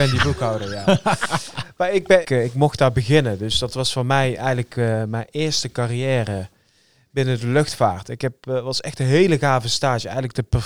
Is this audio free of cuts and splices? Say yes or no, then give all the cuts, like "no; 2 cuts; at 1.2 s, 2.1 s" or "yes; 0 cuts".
no; 1 cut; at 2.2 s